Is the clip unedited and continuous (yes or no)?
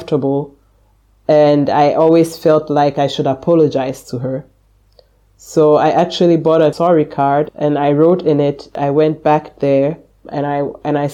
yes